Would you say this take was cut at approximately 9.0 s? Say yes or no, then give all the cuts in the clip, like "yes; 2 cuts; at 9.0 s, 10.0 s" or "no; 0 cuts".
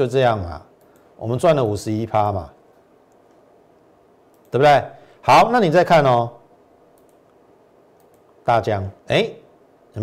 yes; 1 cut; at 9.0 s